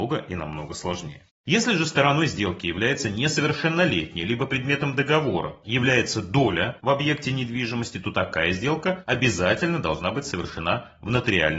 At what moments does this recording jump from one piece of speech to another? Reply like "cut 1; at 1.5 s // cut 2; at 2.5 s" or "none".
cut 1; at 1.4 s